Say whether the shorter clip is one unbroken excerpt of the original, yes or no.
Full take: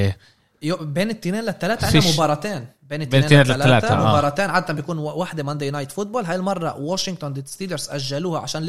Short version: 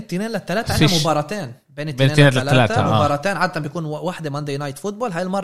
yes